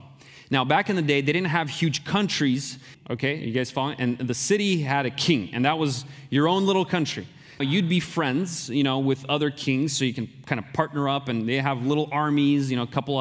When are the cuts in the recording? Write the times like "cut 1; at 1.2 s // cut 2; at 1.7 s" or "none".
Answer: cut 1; at 2.9 s // cut 2; at 7.6 s